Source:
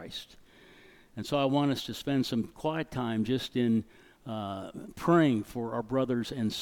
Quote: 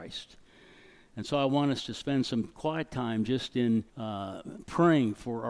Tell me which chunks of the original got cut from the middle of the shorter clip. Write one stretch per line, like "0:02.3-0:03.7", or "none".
0:03.9-0:04.2